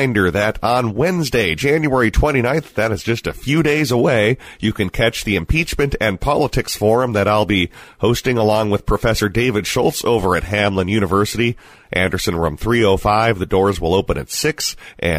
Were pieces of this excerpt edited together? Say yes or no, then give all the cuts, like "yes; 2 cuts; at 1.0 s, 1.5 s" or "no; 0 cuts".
no; 0 cuts